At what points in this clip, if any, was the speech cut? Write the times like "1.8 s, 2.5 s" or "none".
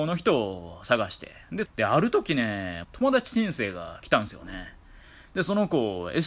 1.6 s, 2.8 s